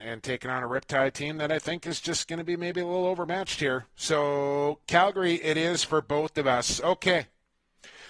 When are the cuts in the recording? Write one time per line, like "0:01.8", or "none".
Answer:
none